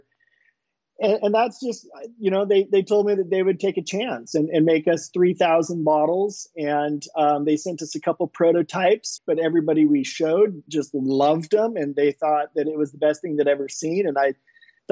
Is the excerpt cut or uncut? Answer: cut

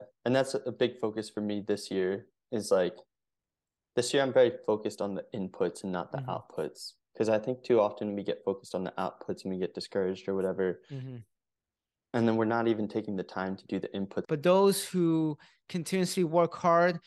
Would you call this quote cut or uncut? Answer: cut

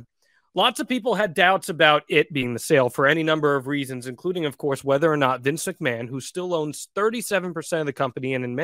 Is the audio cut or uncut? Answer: uncut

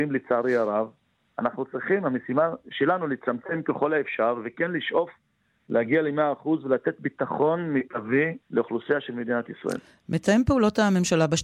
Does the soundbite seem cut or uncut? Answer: cut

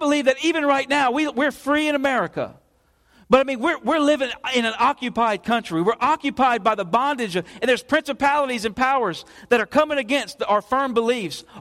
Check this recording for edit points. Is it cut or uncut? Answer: uncut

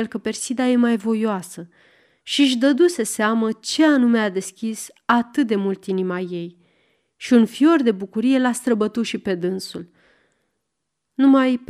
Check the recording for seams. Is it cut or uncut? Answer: uncut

